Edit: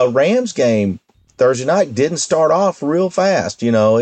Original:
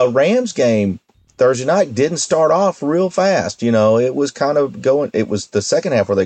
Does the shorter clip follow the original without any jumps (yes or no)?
yes